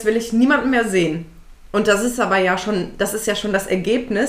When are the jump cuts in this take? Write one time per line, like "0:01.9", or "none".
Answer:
none